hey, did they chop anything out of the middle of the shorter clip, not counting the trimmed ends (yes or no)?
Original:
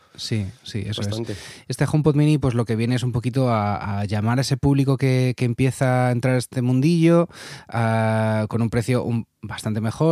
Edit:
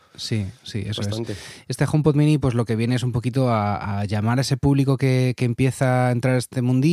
no